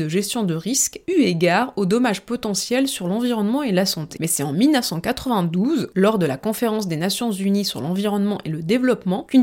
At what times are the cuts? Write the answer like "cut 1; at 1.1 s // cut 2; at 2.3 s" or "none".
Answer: cut 1; at 4.2 s // cut 2; at 5.9 s